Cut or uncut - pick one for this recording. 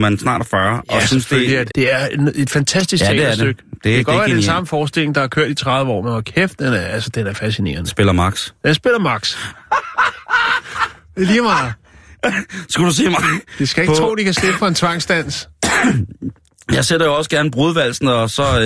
cut